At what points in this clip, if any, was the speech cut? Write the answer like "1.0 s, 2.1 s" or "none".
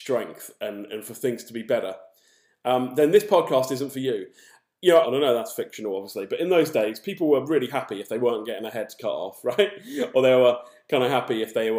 5.0 s